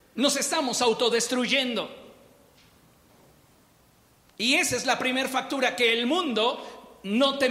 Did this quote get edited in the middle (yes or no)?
no